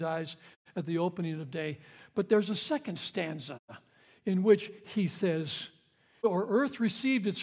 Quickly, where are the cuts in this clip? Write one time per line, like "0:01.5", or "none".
0:06.2